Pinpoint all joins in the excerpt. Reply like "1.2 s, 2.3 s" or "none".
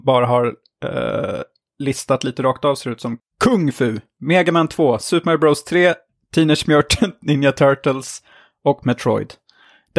none